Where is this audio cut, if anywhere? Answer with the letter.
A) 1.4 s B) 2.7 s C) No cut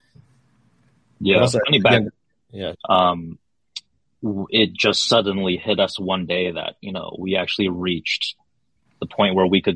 B